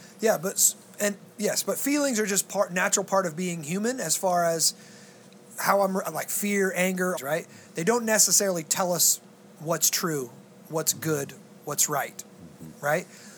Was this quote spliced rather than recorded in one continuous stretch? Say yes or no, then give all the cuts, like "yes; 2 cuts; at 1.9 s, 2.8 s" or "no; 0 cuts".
yes; 1 cut; at 7.2 s